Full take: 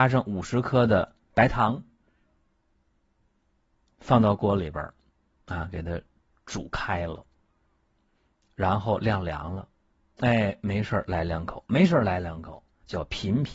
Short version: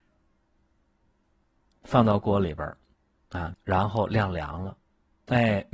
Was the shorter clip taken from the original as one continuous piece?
no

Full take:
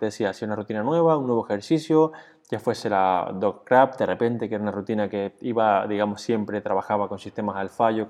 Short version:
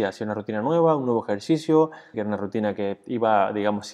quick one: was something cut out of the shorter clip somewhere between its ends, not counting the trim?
yes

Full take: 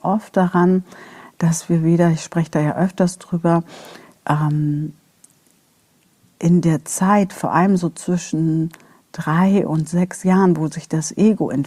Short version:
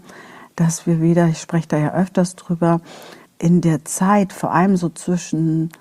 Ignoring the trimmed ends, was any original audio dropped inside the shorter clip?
yes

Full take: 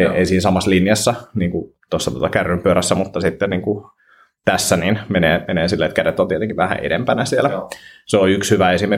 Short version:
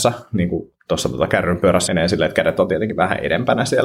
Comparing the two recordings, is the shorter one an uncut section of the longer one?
no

